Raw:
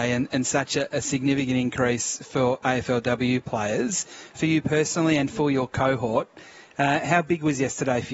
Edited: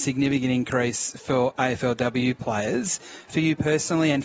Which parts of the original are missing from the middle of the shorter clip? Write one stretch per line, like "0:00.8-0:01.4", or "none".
none

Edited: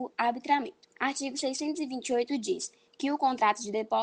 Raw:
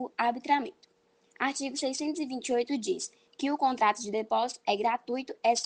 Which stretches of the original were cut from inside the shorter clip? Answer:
0:00.9-0:01.3

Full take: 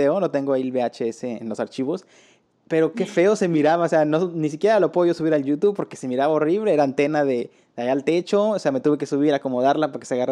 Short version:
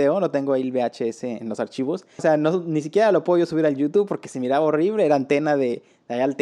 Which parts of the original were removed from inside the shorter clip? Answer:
0:02.2-0:03.9

